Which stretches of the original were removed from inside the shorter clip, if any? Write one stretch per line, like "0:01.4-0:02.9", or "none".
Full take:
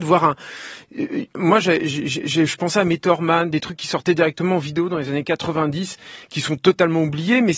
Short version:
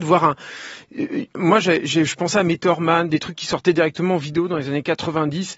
0:01.8-0:02.2